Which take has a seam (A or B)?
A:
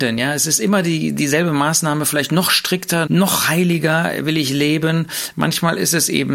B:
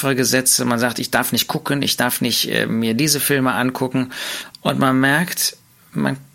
A